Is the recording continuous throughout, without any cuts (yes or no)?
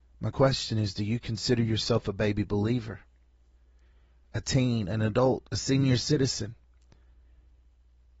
yes